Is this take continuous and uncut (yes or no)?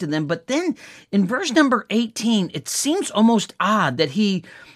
yes